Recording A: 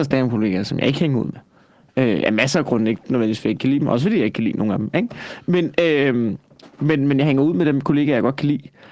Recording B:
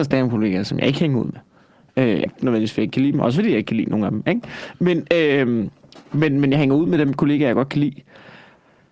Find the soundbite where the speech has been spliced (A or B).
B